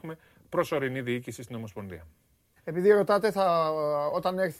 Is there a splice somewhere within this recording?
yes; 1 cut; at 2.6 s

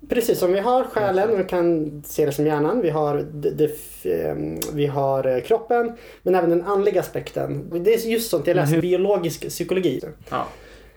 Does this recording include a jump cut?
yes; 3 cuts; at 7.7 s, 8.8 s, 10.0 s

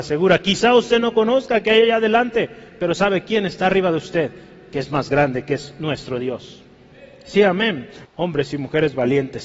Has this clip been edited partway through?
yes; 1 cut; at 8.1 s

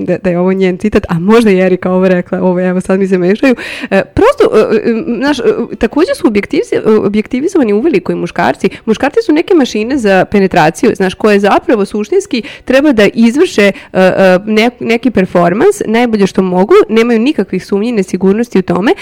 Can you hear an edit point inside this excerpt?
no; 0 cuts

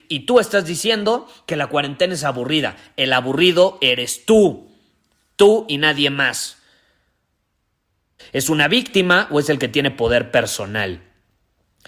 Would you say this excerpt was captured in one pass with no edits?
no; 1 cut; at 8.2 s

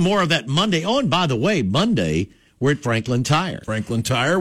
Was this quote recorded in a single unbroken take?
yes; 0 cuts

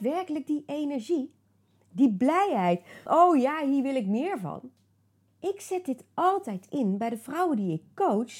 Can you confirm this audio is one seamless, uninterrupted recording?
no; 2 cuts; at 3.1 s, 5.3 s

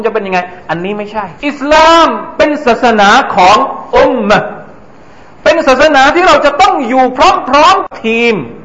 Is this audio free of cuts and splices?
no; 1 cut; at 1.4 s

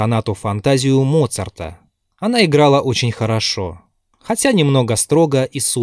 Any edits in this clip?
no; 0 cuts

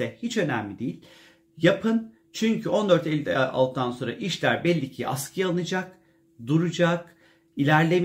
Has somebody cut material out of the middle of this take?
no; 0 cuts

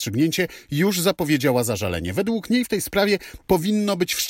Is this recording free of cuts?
yes; 0 cuts

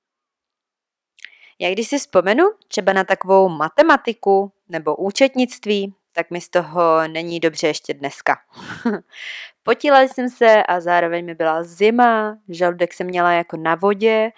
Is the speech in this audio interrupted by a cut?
no; 0 cuts

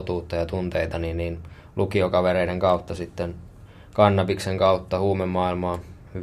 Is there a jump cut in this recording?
no; 0 cuts

